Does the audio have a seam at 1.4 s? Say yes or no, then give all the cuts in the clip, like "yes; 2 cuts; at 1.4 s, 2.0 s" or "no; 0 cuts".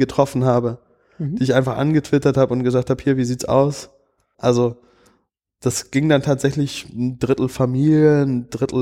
no; 1 cut; at 4.3 s